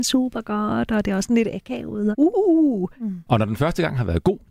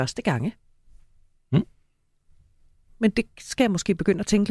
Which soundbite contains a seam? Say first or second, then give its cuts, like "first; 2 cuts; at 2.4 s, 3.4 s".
first; 2 cuts; at 2.1 s, 3.3 s